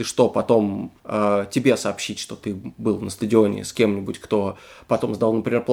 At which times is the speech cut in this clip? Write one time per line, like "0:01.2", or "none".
0:01.0